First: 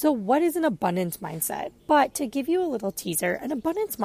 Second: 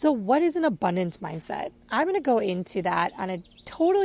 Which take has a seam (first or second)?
first